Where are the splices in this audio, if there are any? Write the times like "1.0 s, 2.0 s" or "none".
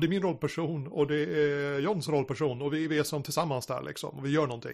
none